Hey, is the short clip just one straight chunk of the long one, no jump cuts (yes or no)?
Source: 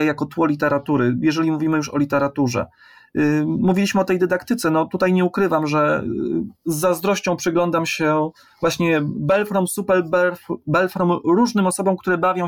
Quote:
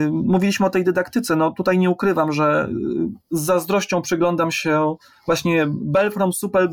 yes